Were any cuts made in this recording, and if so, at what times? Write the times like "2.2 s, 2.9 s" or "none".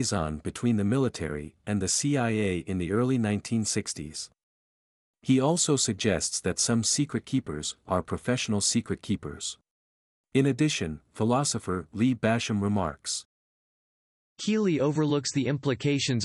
10.2 s